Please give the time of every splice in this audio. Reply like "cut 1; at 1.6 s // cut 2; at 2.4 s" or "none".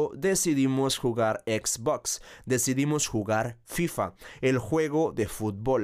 none